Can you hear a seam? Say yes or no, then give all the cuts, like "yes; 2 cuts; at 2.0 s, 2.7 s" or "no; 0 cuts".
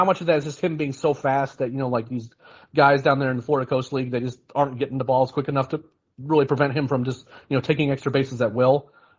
no; 0 cuts